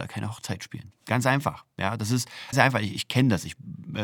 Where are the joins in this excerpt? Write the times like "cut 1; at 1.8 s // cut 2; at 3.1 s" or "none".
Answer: cut 1; at 2.5 s